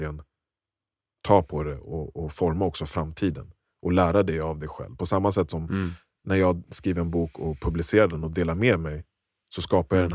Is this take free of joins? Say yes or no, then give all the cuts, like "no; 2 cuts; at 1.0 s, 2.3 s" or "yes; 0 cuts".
yes; 0 cuts